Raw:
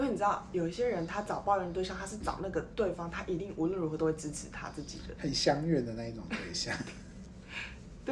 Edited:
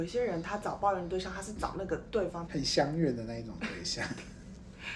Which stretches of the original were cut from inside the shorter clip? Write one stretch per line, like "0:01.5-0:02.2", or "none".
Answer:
0:03.1-0:05.2